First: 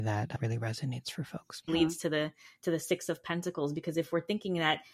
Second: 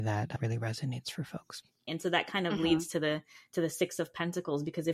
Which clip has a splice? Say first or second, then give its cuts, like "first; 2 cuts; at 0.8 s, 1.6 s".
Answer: first; 1 cut; at 1.7 s